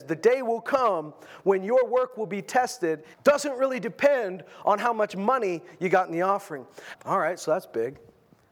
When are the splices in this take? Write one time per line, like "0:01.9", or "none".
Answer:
0:03.1
0:06.9